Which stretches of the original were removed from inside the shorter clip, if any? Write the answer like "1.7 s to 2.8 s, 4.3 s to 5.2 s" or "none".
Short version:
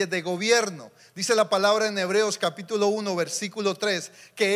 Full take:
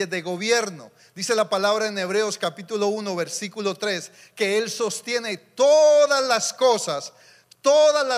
none